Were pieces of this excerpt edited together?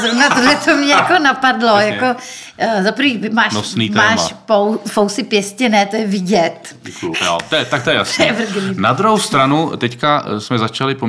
yes; 1 cut; at 7.1 s

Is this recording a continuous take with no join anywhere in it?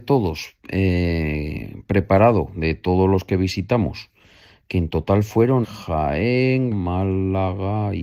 no; 2 cuts; at 5.6 s, 6.7 s

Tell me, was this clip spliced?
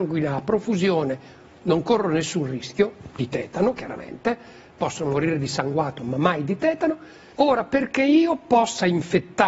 yes; 1 cut; at 7.3 s

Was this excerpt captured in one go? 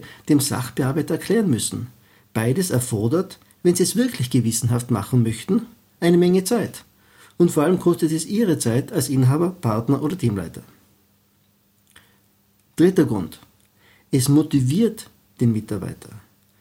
yes; 0 cuts

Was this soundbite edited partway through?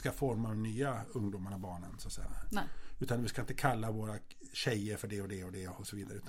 no; 0 cuts

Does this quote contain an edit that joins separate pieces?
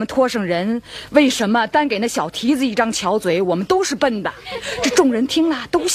no; 0 cuts

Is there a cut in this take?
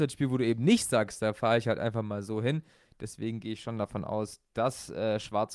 no; 0 cuts

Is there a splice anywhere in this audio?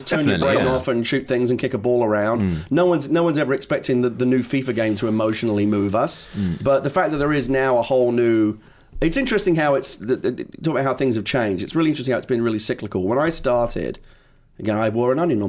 no; 0 cuts

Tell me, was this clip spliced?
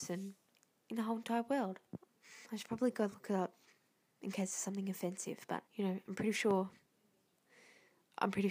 yes; 2 cuts; at 1.9 s, 5.7 s

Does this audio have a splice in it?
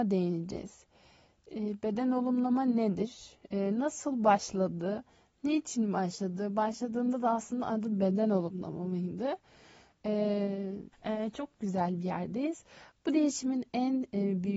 yes; 1 cut; at 10.9 s

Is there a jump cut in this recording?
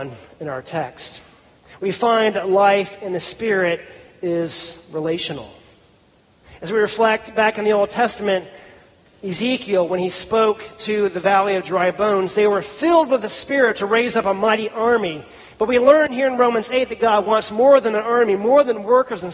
no; 0 cuts

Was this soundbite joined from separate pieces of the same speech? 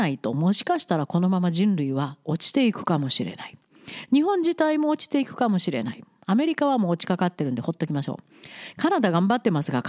no; 0 cuts

